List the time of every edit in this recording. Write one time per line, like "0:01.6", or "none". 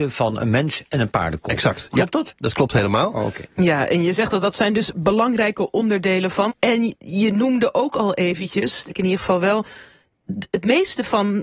0:03.5
0:06.5
0:08.9